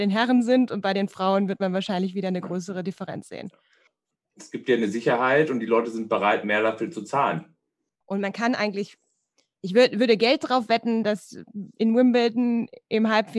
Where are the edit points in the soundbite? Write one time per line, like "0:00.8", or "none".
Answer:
0:04.2
0:08.0